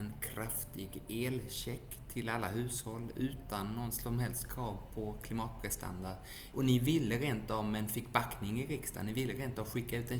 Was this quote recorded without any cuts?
no; 1 cut; at 6.5 s

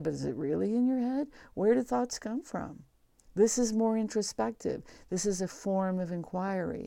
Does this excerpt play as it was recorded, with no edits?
yes; 0 cuts

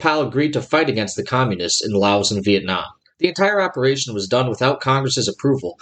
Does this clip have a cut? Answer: no; 0 cuts

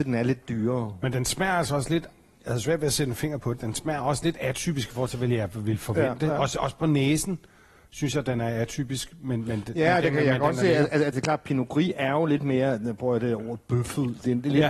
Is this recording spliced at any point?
no; 0 cuts

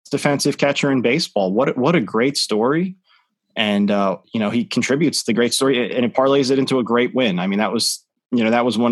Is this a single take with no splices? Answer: yes; 0 cuts

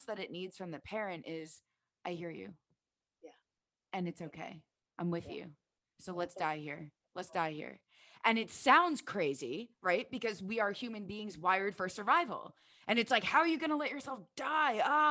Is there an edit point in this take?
yes; 1 cut; at 4.8 s

